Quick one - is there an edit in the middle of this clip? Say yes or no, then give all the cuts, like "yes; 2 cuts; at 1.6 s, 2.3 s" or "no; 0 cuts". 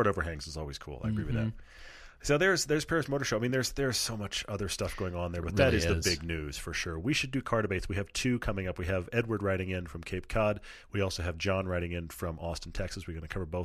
no; 0 cuts